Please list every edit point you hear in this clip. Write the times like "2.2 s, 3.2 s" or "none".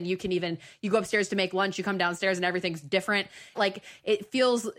3.5 s